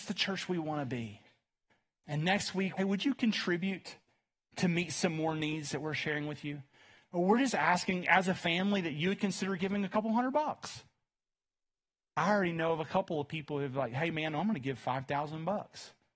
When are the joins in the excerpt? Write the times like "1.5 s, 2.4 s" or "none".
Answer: 2.8 s